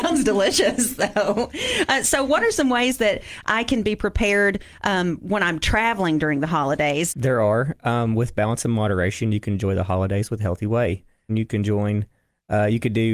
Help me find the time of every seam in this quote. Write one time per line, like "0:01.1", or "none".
0:07.1
0:11.3